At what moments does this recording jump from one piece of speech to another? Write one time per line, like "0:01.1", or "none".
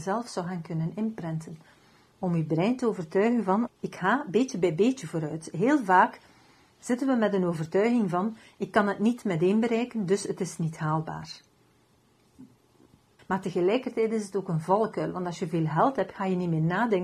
0:03.7
0:13.2